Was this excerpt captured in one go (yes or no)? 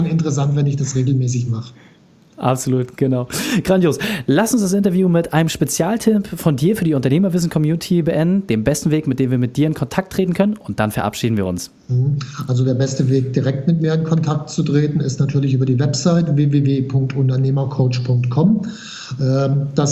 yes